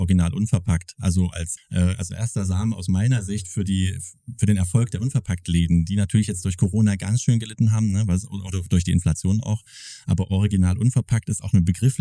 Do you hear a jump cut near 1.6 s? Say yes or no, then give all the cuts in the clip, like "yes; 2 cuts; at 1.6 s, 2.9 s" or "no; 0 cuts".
yes; 1 cut; at 1.6 s